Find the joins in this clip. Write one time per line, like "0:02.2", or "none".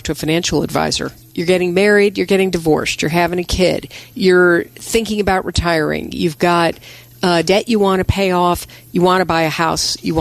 0:01.3
0:07.5